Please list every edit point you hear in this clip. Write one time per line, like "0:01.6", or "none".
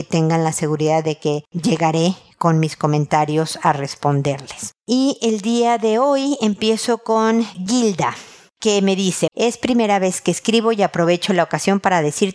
0:04.8
0:09.3